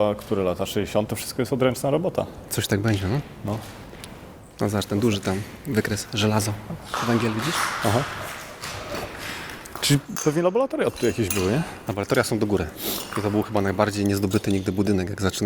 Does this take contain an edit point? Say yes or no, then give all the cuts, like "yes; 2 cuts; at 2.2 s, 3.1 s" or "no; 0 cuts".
yes; 1 cut; at 1.1 s